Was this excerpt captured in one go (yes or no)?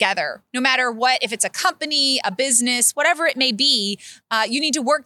no